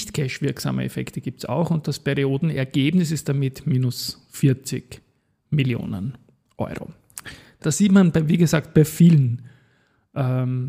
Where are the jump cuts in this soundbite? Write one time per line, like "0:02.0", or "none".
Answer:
0:07.6